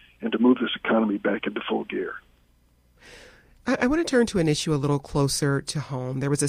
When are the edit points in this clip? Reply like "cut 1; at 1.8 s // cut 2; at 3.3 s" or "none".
none